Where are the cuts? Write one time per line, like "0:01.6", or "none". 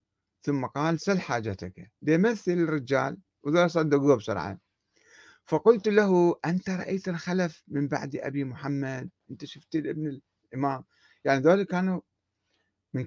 none